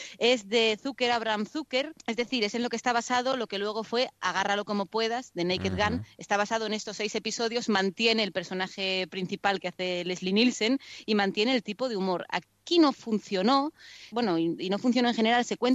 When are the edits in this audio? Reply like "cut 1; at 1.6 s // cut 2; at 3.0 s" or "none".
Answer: cut 1; at 2.0 s // cut 2; at 14.1 s